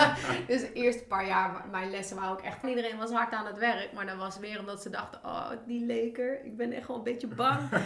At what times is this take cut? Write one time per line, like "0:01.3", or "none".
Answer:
0:02.6

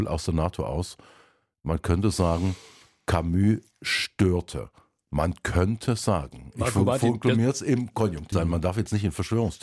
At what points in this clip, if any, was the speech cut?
0:08.3

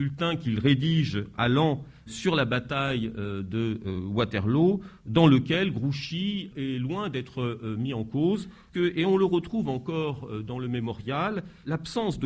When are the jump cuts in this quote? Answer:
0:08.7

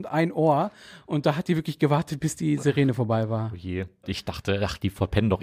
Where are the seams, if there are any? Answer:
0:04.0

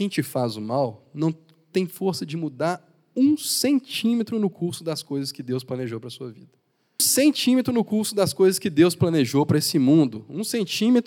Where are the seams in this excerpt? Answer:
0:07.0

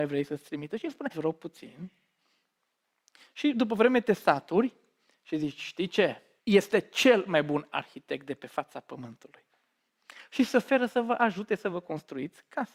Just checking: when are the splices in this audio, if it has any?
0:01.1
0:06.4

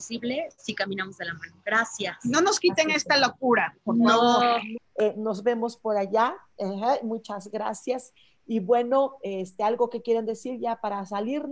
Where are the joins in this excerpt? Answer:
0:04.8

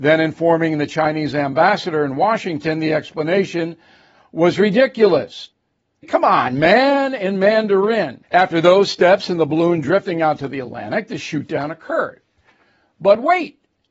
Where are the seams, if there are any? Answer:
0:06.0
0:08.2

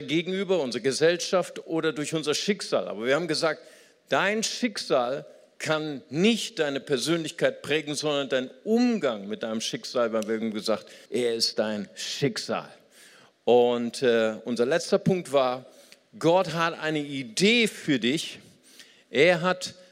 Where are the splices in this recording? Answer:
0:11.1

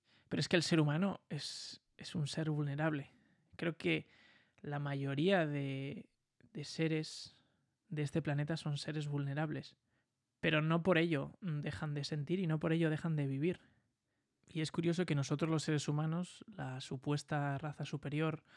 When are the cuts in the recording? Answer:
none

